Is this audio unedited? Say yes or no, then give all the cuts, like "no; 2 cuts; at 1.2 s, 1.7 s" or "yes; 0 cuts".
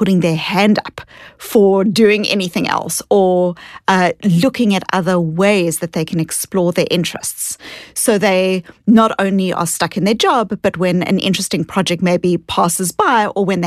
yes; 0 cuts